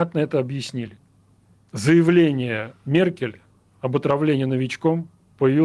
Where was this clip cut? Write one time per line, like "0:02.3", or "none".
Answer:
none